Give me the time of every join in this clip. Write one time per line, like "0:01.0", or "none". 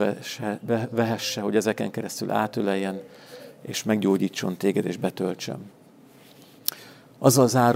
none